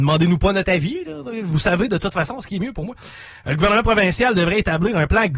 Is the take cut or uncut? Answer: uncut